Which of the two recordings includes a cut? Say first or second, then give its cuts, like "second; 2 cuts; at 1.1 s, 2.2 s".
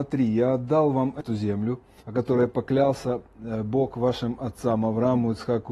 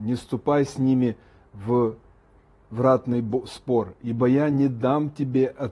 first; 1 cut; at 2.0 s